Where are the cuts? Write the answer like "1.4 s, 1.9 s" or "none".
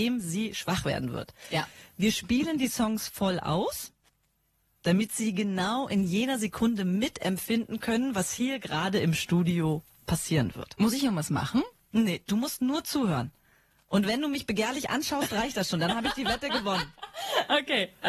none